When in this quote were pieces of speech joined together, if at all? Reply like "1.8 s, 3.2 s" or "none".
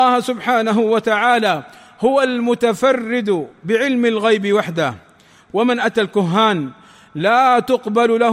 none